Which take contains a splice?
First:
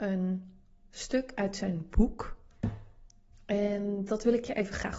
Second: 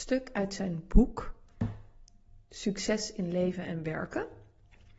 first; 1 cut; at 3.3 s

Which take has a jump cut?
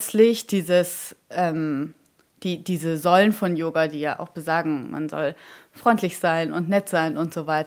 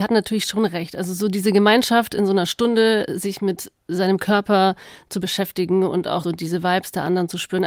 second; 1 cut; at 6.2 s

